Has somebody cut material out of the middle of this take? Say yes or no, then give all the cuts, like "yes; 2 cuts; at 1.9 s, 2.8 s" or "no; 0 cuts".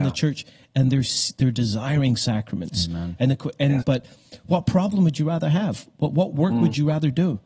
yes; 1 cut; at 3.8 s